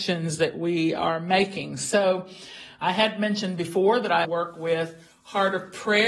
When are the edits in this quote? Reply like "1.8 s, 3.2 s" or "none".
4.2 s